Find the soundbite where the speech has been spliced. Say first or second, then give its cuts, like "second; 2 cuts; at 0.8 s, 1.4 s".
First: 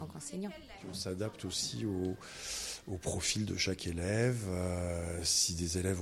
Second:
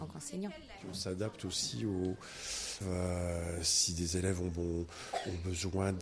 second; 1 cut; at 2.8 s